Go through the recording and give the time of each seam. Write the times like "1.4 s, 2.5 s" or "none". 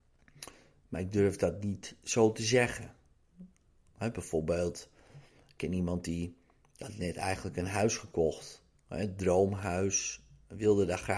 none